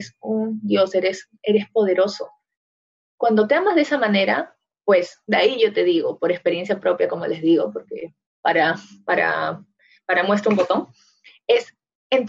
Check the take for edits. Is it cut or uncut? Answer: uncut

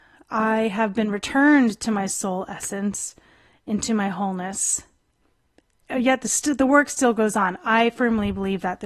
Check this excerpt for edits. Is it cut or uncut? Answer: uncut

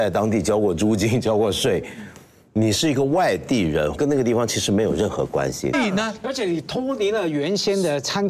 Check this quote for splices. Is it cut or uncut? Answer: cut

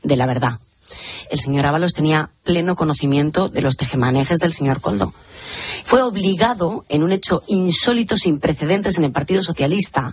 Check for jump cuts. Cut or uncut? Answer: cut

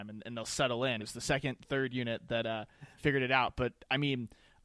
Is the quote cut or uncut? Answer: cut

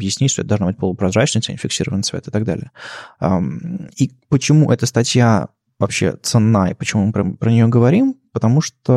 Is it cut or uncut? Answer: uncut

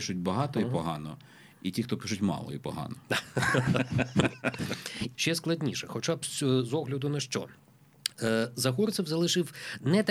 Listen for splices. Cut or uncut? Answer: cut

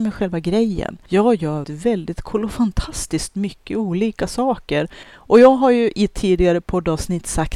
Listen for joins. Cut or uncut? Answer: cut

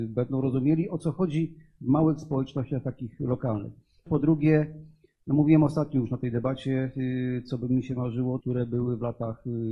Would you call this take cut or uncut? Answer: cut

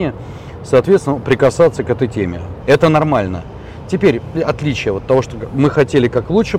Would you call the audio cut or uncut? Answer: cut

